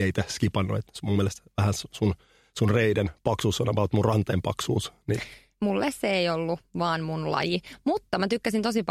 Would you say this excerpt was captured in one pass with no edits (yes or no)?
yes